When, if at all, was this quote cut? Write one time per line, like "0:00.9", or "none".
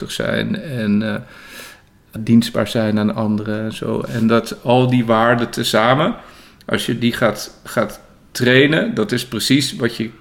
0:02.2